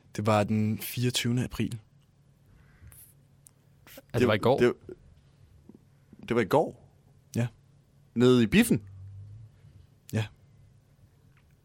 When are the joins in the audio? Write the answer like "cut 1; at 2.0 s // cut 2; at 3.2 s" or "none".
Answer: none

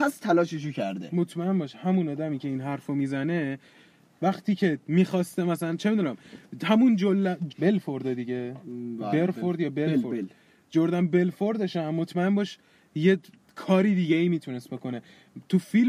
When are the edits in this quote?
cut 1; at 7.5 s

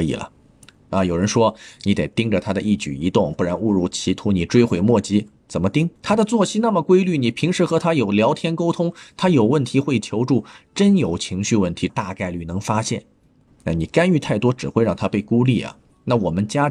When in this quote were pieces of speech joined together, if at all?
cut 1; at 6.0 s // cut 2; at 11.9 s // cut 3; at 13.5 s

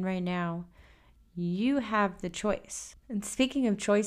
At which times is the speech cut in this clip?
none

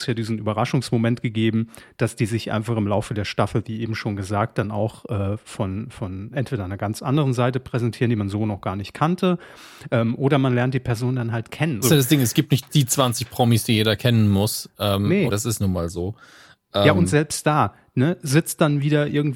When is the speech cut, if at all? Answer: cut 1; at 11.8 s // cut 2; at 15.3 s

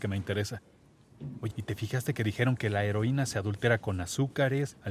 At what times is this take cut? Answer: cut 1; at 1.5 s

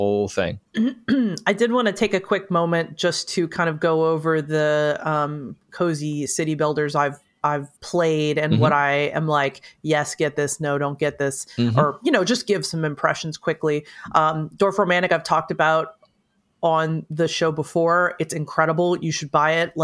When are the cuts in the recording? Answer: cut 1; at 7.8 s

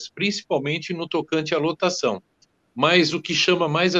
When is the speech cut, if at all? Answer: cut 1; at 2.6 s

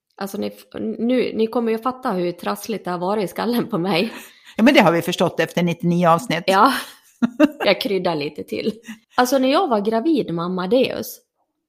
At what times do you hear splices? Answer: cut 1; at 9.0 s

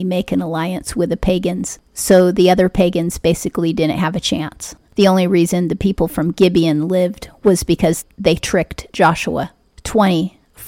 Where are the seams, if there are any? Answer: none

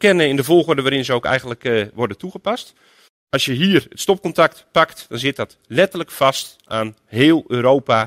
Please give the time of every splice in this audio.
cut 1; at 3.1 s

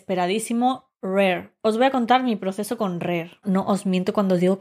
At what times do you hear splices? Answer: cut 1; at 1.6 s // cut 2; at 3.4 s

